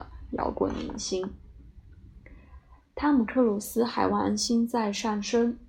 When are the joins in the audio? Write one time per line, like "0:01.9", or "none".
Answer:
none